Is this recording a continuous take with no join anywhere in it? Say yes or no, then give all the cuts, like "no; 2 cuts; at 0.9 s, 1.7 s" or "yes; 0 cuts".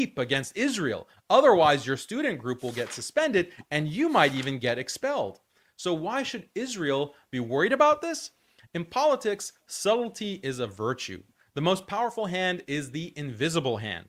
yes; 0 cuts